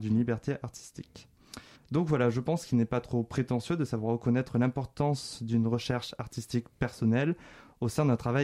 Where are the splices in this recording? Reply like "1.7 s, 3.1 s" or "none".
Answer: 1.7 s